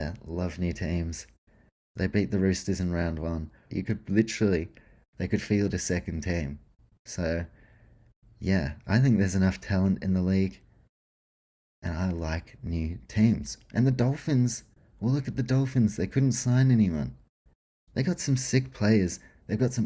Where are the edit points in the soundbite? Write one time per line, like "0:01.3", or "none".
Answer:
0:01.9
0:03.7
0:14.8